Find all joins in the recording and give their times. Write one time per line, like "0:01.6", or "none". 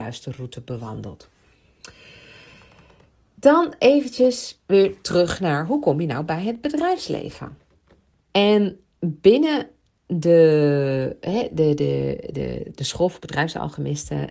0:08.2